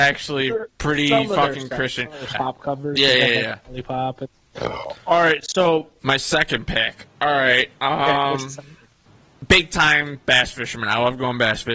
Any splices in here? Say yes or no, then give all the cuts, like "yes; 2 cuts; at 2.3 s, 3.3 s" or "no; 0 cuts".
yes; 1 cut; at 2.3 s